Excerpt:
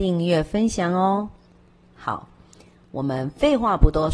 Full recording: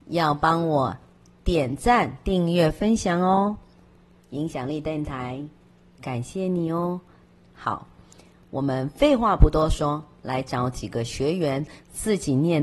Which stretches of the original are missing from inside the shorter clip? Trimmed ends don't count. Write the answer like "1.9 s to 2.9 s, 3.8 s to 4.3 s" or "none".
4.1 s to 7.4 s

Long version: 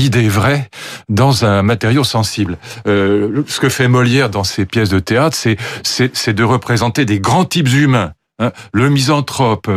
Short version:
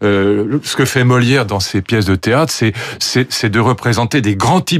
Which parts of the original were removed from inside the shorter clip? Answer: none

